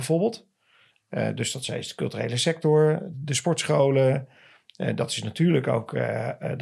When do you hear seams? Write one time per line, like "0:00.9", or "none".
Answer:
0:03.1